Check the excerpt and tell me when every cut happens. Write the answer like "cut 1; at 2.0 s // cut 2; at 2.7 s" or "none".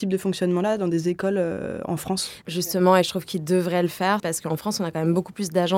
cut 1; at 2.4 s // cut 2; at 4.2 s